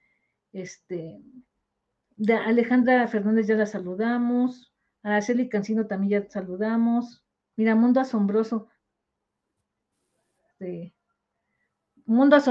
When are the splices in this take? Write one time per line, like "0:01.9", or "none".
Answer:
0:07.5
0:10.5